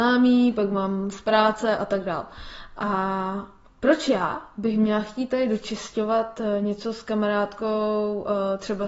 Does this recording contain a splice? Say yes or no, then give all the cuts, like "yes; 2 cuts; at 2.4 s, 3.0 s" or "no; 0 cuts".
no; 0 cuts